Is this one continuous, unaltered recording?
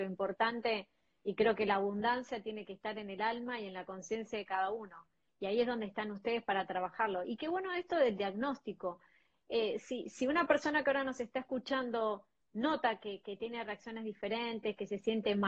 yes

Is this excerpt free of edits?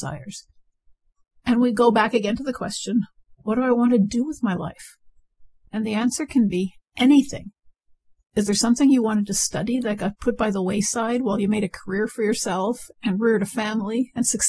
yes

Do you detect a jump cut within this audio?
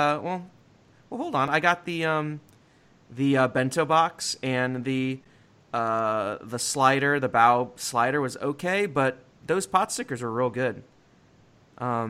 no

